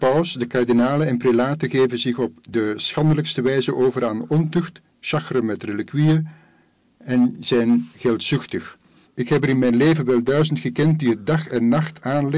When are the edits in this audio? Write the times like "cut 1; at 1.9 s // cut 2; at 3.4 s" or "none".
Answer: cut 1; at 9.0 s